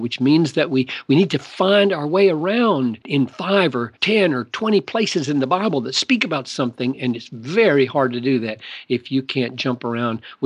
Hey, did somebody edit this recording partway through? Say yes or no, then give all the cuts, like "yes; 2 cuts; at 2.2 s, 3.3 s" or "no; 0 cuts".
no; 0 cuts